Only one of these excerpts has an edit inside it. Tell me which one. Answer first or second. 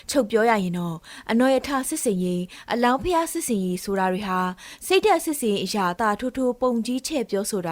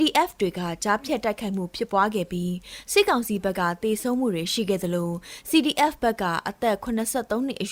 first